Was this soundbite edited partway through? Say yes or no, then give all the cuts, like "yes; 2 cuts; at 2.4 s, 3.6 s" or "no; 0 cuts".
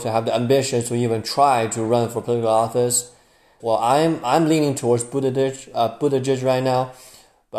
yes; 1 cut; at 3.6 s